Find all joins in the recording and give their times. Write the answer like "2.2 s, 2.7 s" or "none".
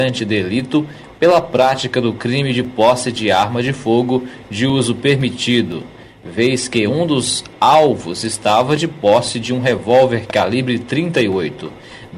none